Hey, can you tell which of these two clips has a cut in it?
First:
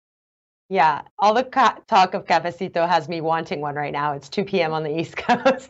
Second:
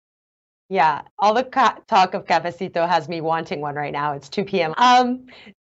second; 1 cut; at 4.7 s

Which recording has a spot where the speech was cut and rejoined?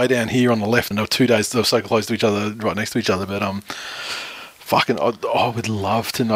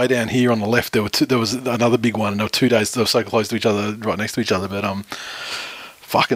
first; 1 cut; at 0.9 s

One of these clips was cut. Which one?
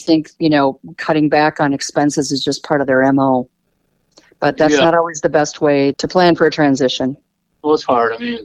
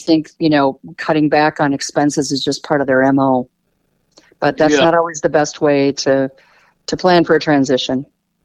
first; 1 cut; at 5.9 s

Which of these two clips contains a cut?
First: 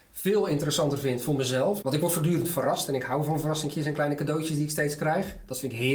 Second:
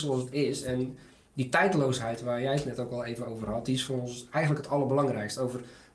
first; 1 cut; at 1.8 s

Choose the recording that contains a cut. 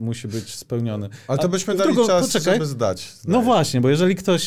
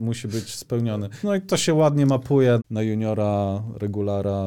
second; 2 cuts; at 1.2 s, 2.6 s

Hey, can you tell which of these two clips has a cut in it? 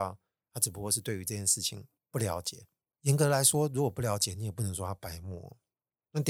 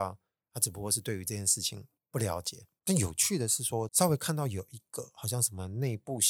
second; 2 cuts; at 2.8 s, 3.9 s

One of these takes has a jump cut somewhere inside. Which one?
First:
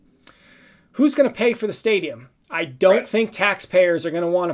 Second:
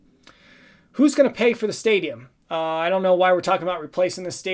second; 1 cut; at 2.4 s

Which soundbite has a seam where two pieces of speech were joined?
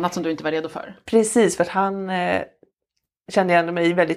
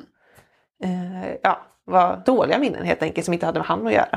second; 1 cut; at 2.2 s

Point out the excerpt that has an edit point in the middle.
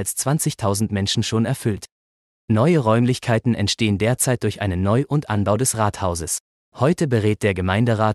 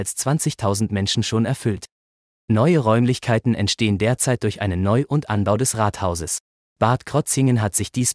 second; 1 cut; at 6.6 s

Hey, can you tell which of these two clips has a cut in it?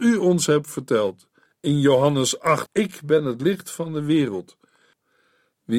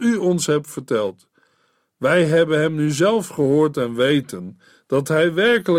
first; 2 cuts; at 1.5 s, 2.7 s

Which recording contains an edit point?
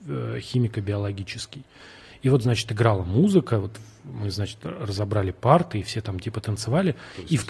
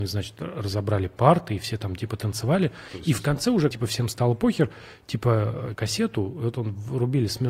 second; 2 cuts; at 3.7 s, 5.8 s

